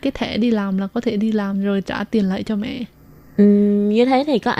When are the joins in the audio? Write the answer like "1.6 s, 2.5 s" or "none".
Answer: none